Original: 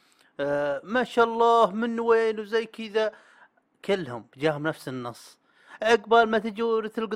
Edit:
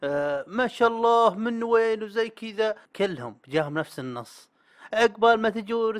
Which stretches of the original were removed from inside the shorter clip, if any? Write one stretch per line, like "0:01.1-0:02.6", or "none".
0:03.2-0:03.7